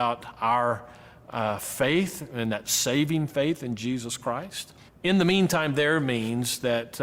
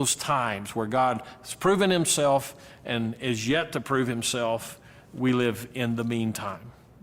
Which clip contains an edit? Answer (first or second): first